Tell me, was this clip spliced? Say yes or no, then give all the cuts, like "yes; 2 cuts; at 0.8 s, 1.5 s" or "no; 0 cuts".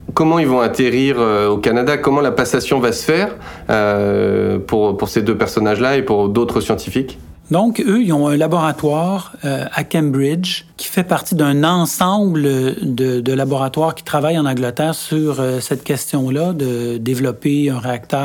yes; 1 cut; at 10.7 s